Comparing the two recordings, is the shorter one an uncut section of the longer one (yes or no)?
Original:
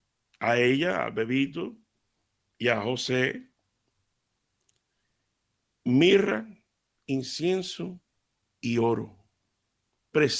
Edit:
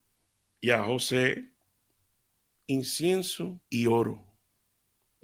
no